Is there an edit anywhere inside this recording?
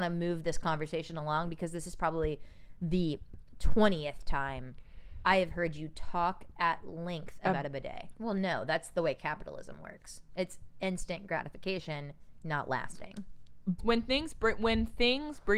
yes; 2 cuts; at 8.2 s, 13.8 s

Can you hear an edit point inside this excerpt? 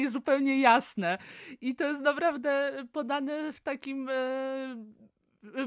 no; 0 cuts

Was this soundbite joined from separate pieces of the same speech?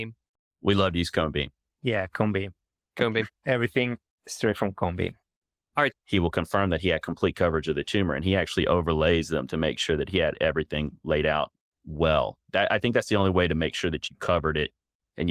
yes; 1 cut; at 5.9 s

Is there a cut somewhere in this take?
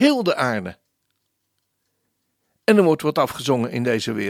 no; 0 cuts

